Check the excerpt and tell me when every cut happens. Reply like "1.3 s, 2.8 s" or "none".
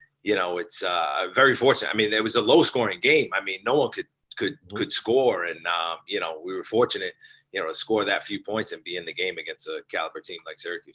none